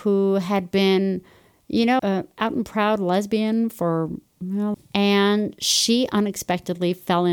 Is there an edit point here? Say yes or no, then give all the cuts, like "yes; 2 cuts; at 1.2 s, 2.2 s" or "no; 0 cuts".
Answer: yes; 2 cuts; at 2.0 s, 4.7 s